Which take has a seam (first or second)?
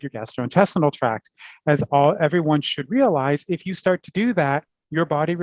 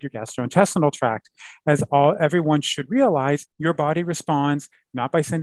second